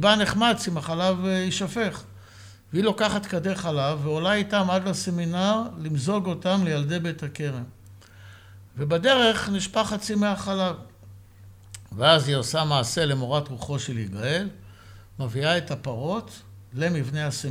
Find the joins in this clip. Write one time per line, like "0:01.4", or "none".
none